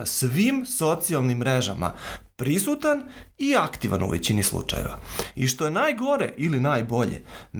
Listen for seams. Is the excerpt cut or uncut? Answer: uncut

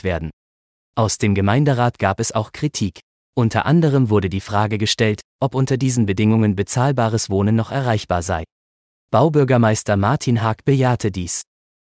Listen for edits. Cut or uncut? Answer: uncut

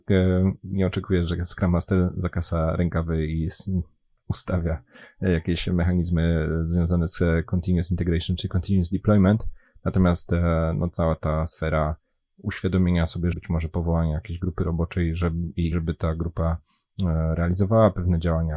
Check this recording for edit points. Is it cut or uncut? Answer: cut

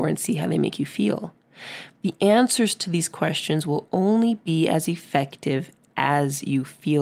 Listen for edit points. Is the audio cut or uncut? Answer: uncut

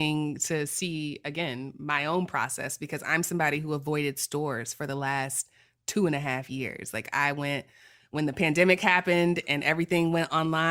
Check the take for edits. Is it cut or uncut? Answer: uncut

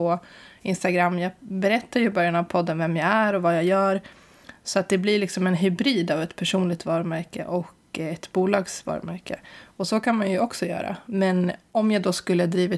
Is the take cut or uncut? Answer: uncut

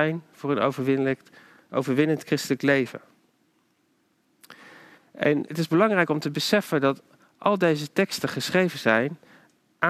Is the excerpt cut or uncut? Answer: cut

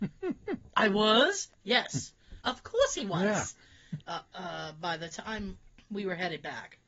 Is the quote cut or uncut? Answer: cut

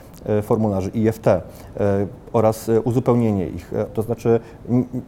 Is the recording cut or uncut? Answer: cut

